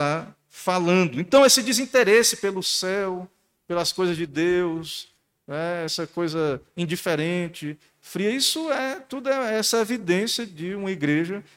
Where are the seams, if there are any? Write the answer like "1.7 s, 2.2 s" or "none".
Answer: none